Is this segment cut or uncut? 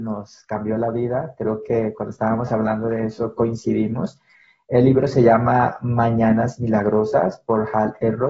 uncut